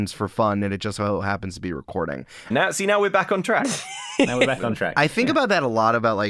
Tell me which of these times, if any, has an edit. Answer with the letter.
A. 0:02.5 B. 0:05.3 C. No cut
A